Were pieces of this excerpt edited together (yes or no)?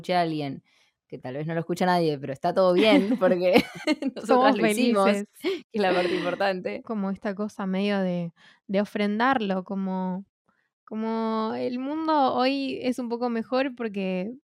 yes